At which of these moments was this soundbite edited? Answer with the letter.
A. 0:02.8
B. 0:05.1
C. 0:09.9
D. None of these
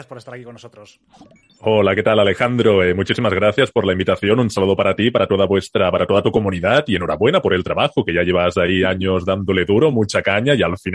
D